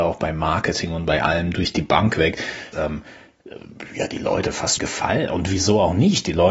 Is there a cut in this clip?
yes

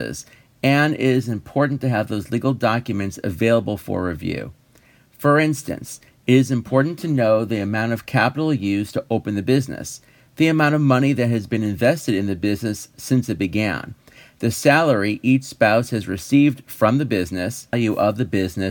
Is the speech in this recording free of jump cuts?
yes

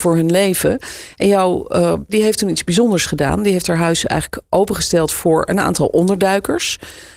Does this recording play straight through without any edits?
no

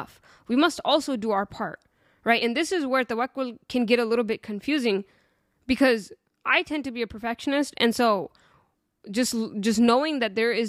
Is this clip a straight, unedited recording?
yes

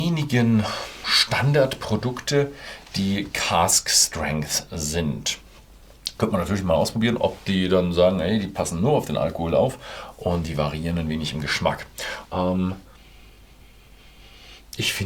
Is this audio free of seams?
no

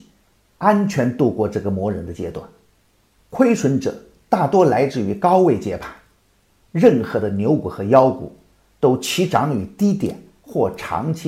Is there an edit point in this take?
no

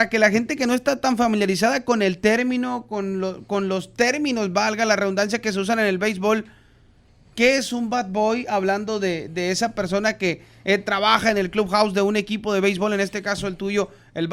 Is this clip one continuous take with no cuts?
yes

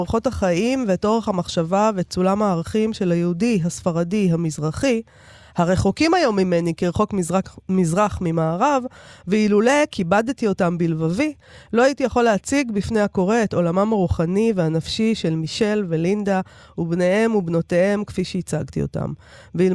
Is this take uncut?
yes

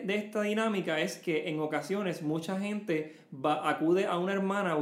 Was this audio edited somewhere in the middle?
no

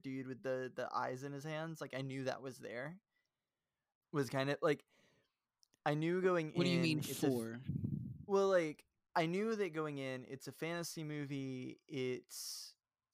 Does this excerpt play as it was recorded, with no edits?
no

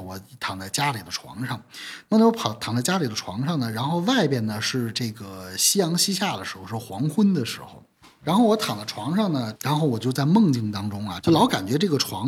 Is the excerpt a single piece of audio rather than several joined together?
no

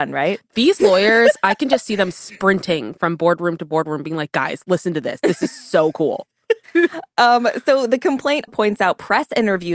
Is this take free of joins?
no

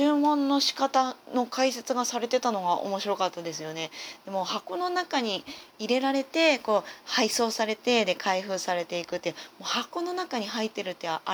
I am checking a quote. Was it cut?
no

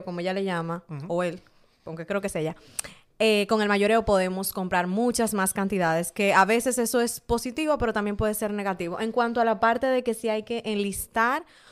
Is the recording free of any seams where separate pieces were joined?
yes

